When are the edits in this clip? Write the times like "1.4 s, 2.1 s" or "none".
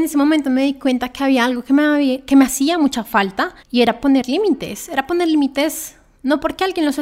3.6 s